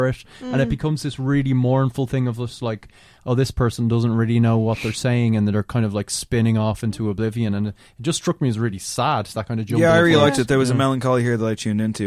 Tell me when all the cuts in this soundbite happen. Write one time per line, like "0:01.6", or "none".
none